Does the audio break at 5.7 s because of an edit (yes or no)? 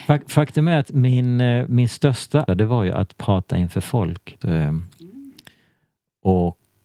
no